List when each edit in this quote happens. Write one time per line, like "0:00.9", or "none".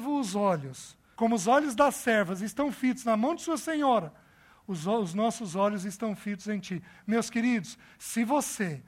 0:01.2